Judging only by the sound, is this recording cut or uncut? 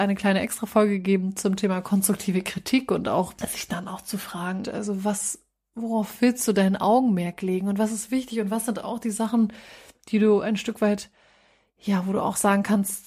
cut